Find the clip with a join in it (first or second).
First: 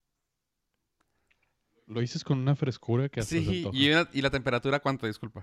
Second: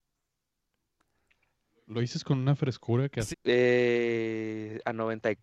second